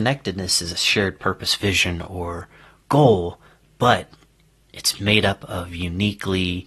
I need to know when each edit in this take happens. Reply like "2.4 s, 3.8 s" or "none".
none